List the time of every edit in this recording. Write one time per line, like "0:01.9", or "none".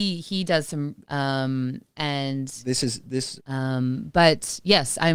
0:01.0
0:03.4